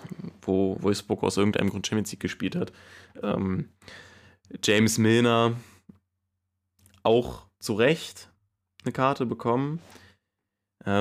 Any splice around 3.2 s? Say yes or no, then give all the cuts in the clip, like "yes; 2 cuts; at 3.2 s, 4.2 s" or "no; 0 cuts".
yes; 1 cut; at 3.2 s